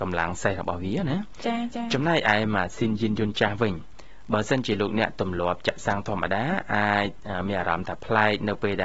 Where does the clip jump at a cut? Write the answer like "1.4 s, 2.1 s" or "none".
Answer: none